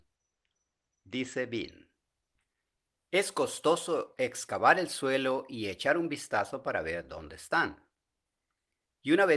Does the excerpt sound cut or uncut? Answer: uncut